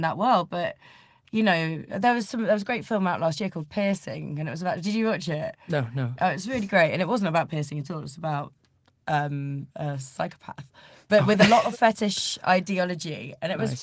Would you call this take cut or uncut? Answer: uncut